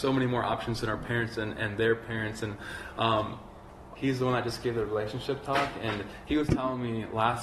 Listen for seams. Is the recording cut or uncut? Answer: cut